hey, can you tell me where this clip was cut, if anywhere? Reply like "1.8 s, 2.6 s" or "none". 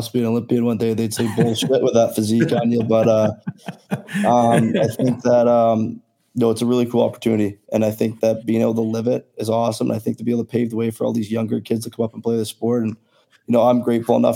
none